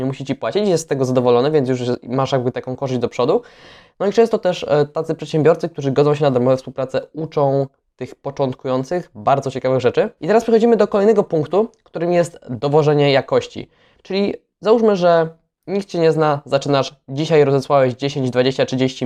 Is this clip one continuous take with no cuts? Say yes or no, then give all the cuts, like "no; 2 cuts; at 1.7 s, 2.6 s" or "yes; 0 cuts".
no; 2 cuts; at 10.2 s, 14.0 s